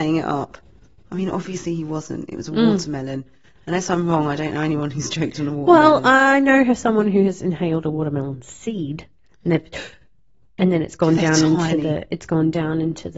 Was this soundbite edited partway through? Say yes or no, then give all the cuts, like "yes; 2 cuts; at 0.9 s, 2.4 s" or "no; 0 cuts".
no; 0 cuts